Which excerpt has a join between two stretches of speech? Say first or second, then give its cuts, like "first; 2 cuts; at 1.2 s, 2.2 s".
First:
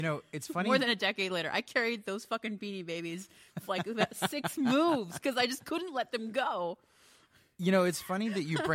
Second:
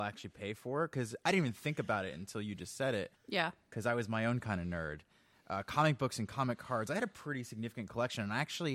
second; 1 cut; at 3.1 s